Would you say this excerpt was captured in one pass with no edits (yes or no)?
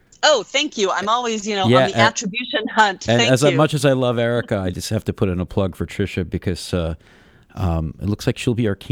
yes